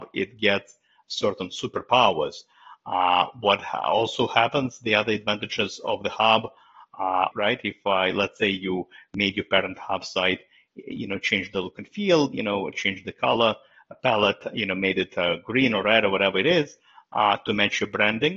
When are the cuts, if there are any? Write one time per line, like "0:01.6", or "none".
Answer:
0:07.3

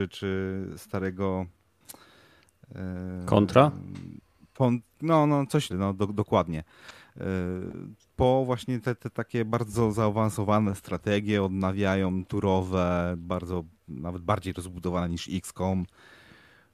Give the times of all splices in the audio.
0:05.7

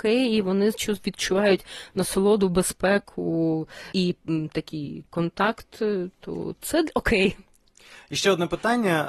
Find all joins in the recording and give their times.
0:03.9

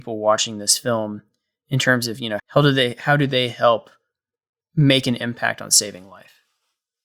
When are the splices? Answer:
0:02.4
0:04.6

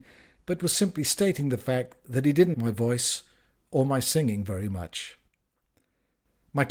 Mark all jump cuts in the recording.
0:02.5

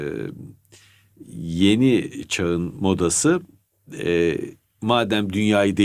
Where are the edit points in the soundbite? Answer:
none

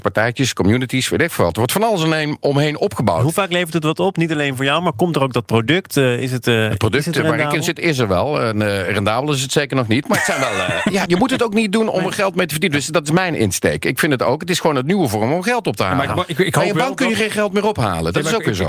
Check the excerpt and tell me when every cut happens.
0:11.1

